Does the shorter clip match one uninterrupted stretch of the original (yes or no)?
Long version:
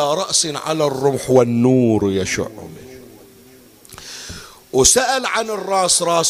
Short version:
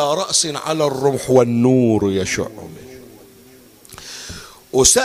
yes